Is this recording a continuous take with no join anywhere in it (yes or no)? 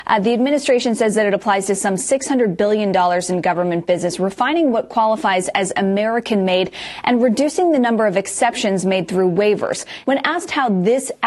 no